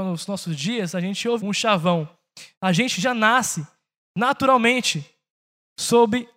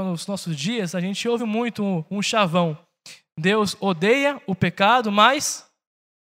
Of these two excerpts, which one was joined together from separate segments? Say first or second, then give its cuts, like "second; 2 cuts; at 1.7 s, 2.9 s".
first; 2 cuts; at 1.4 s, 2.5 s